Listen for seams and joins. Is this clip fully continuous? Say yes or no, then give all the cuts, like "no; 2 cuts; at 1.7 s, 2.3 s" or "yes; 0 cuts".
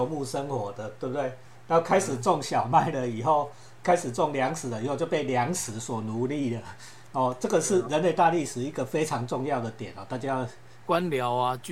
no; 1 cut; at 10.8 s